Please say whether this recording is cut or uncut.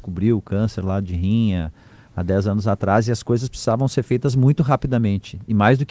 uncut